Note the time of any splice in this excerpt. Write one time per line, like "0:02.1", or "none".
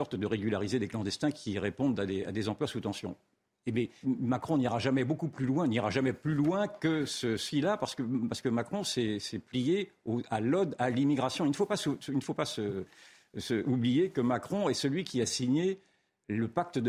0:04.0